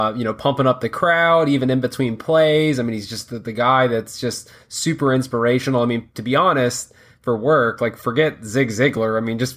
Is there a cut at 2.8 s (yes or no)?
no